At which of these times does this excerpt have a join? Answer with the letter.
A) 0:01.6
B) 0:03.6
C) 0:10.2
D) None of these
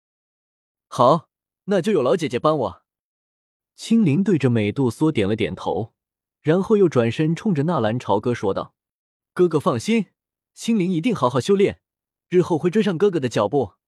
D